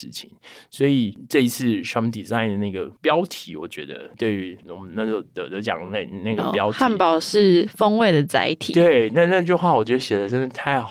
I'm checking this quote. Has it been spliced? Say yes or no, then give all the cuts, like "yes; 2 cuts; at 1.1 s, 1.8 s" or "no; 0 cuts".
no; 0 cuts